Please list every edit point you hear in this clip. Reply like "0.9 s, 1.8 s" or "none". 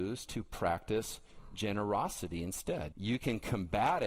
2.9 s